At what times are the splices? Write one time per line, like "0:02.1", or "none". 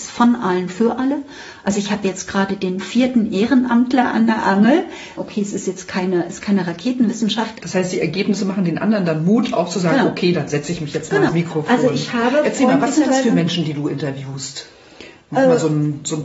0:05.2
0:07.6
0:11.3